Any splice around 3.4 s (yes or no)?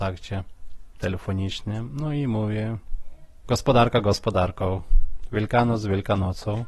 yes